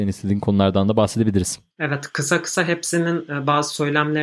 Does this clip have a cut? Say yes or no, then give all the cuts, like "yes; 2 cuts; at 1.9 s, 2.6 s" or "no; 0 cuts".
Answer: yes; 1 cut; at 1.7 s